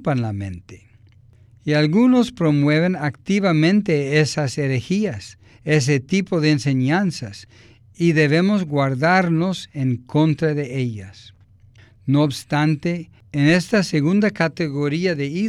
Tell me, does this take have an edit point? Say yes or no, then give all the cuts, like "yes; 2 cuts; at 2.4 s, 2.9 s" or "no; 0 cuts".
no; 0 cuts